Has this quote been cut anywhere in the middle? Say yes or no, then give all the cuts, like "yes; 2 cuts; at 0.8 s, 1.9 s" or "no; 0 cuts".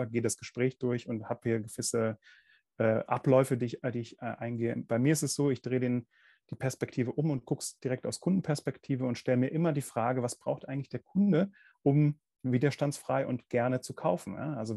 no; 0 cuts